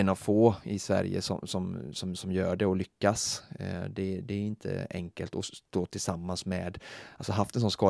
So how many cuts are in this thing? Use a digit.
0